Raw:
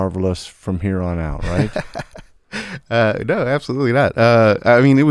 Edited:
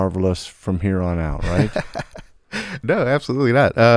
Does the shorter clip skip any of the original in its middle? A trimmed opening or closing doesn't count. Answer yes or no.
yes